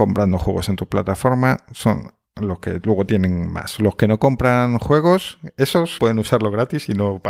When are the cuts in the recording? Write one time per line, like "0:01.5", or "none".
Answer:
0:06.0